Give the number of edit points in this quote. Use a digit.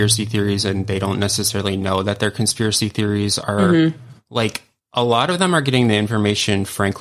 1